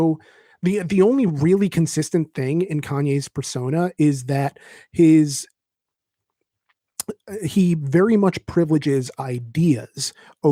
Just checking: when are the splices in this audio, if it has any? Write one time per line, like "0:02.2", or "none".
none